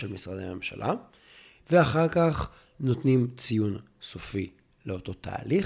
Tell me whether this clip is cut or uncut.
cut